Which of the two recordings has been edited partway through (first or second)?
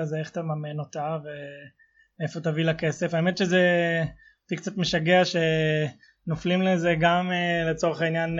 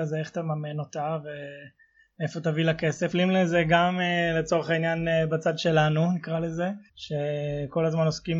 second